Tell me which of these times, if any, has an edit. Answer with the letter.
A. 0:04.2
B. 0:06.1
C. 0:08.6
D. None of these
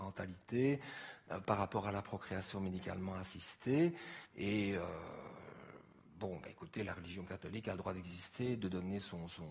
A